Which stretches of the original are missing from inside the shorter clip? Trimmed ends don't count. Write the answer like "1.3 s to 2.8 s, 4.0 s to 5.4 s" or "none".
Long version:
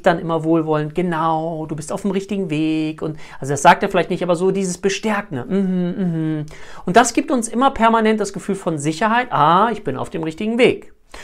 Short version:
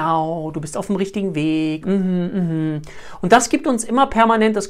3.0 s to 5.5 s